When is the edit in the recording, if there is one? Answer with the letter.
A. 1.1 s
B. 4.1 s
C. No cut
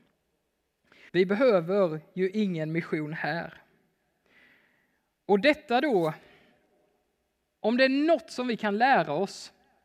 A